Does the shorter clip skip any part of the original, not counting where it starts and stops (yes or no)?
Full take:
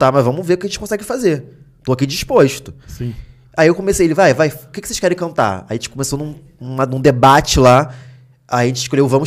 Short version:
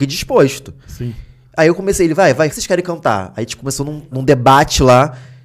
yes